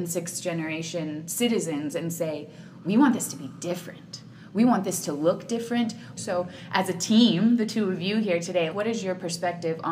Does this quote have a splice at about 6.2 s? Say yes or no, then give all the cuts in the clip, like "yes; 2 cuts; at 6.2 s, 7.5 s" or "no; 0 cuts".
yes; 2 cuts; at 6.2 s, 8.7 s